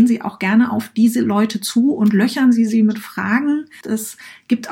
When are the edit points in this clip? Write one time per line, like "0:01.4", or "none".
0:03.8